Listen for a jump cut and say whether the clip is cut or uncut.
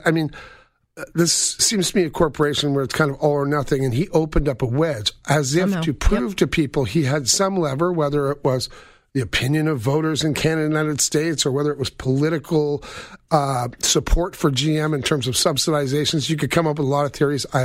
uncut